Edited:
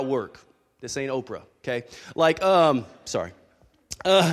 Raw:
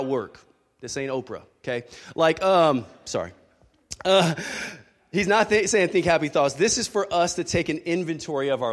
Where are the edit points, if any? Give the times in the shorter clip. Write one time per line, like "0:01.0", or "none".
none